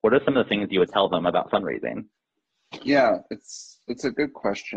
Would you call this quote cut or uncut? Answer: uncut